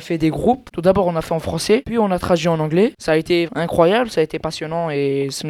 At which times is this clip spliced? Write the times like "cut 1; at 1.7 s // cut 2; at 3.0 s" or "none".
cut 1; at 3.5 s